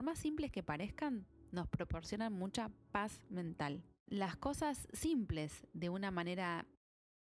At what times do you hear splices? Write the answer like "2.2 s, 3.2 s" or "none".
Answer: 4.1 s